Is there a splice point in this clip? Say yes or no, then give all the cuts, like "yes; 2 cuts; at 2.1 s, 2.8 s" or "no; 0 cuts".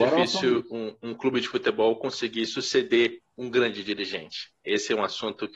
no; 0 cuts